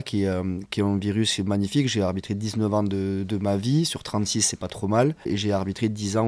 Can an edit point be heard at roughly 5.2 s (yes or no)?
no